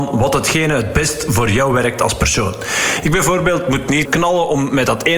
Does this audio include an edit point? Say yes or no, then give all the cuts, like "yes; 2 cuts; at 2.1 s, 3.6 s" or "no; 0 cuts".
yes; 1 cut; at 4.1 s